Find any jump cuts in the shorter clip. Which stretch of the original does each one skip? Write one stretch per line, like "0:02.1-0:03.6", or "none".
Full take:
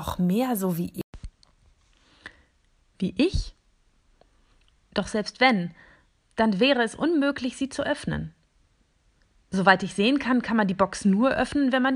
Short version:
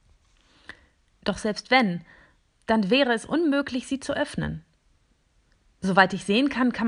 0:02.7-0:04.8